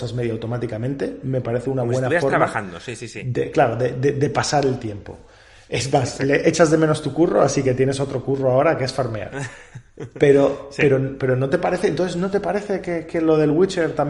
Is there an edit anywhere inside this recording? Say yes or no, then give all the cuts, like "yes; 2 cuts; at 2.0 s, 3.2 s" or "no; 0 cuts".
no; 0 cuts